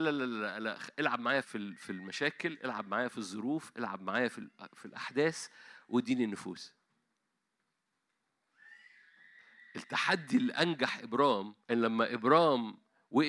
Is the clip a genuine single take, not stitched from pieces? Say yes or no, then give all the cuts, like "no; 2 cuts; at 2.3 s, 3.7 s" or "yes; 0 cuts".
no; 2 cuts; at 1.4 s, 11.6 s